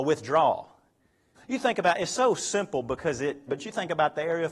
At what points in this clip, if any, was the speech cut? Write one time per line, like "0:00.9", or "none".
0:01.3
0:03.5